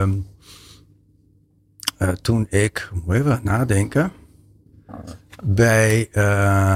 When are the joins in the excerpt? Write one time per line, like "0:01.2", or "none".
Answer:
none